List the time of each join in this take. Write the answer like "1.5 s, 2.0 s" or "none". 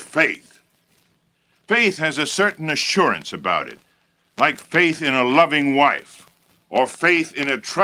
none